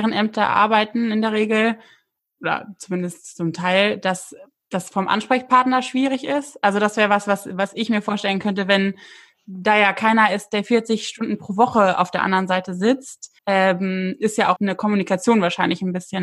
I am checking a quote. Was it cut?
yes; 2 cuts; at 13.4 s, 14.6 s

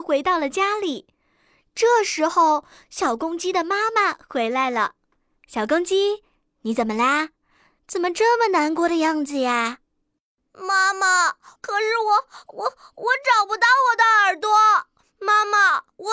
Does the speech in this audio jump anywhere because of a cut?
yes; 1 cut; at 11.6 s

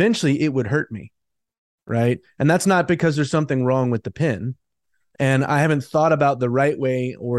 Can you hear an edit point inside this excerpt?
yes; 1 cut; at 5.1 s

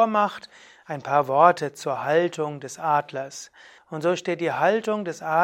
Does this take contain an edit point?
yes; 1 cut; at 3.8 s

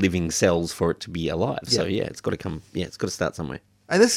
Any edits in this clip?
no; 0 cuts

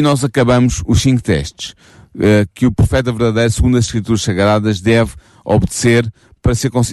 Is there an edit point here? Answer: no; 0 cuts

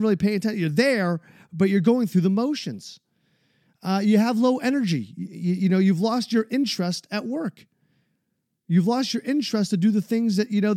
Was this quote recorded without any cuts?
yes; 0 cuts

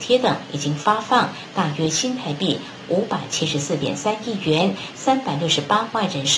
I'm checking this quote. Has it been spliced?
no; 0 cuts

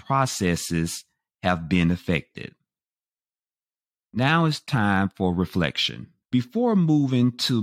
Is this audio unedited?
no; 1 cut; at 6.2 s

